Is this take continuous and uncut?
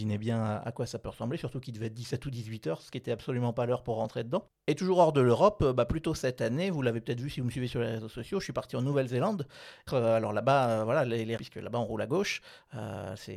no; 2 cuts; at 9.9 s, 11.4 s

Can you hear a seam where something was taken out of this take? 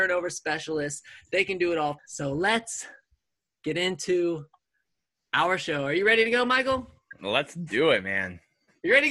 yes; 1 cut; at 2.0 s

